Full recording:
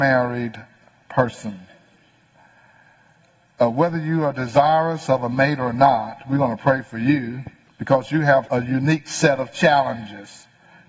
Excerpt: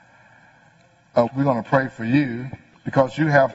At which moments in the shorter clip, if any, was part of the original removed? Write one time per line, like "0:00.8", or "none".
0:01.3